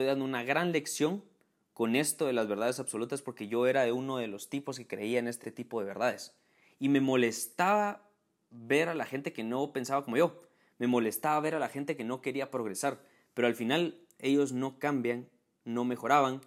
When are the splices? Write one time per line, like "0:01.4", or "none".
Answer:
none